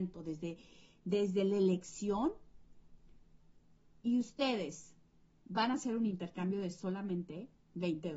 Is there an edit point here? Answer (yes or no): no